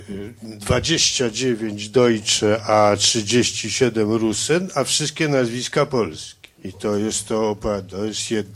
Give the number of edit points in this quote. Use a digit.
1